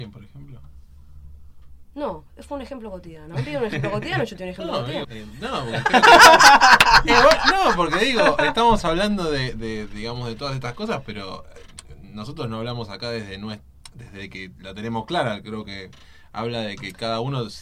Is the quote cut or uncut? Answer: cut